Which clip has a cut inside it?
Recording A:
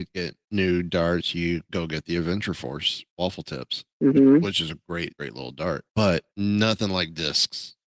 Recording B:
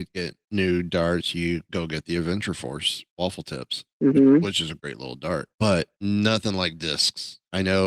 B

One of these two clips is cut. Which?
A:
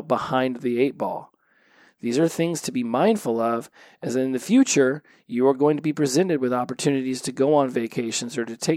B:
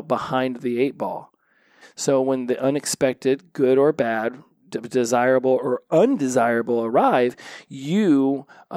B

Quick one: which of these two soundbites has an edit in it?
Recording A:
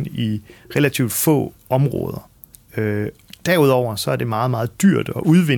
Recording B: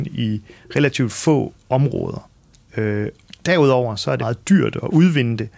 B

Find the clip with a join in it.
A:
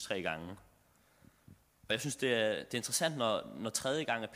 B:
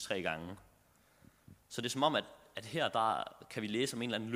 A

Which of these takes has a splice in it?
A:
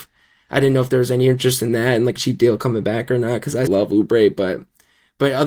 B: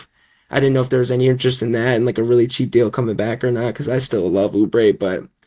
A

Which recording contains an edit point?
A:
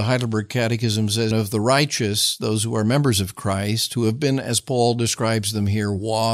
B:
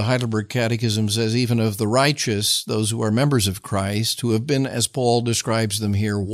A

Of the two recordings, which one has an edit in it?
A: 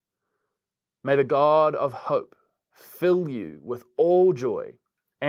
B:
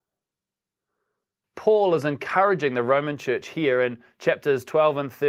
B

